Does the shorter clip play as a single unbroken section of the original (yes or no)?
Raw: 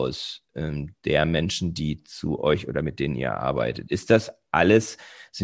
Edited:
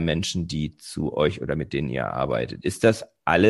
yes